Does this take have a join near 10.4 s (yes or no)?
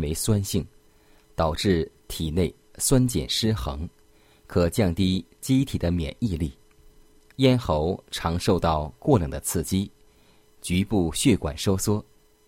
no